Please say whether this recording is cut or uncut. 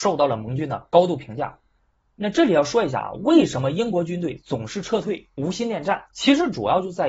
cut